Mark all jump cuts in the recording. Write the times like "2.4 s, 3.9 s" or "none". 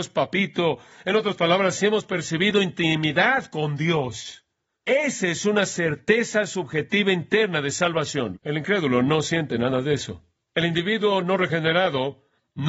8.3 s